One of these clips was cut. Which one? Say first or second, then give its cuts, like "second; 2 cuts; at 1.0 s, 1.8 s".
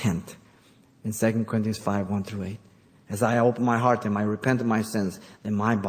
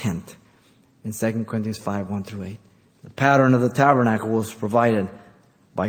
second; 1 cut; at 2.9 s